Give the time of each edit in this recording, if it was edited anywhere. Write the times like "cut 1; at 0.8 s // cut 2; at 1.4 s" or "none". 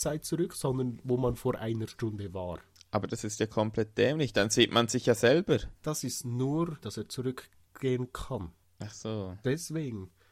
cut 1; at 5.7 s // cut 2; at 6.8 s